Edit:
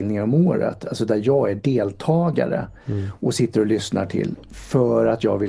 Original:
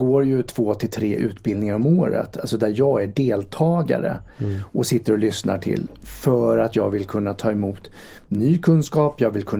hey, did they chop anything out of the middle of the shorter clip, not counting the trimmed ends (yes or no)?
no